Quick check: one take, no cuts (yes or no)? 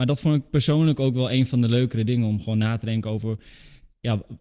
yes